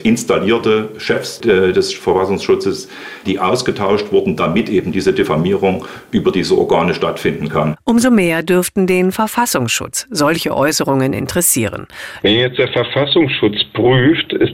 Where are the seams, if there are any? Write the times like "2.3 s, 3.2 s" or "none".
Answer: 3.2 s, 7.8 s, 12.2 s